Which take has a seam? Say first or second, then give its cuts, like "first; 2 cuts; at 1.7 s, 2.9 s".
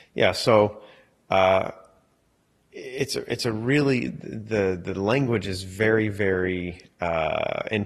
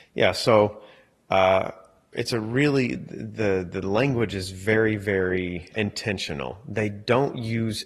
second; 2 cuts; at 2.1 s, 5.7 s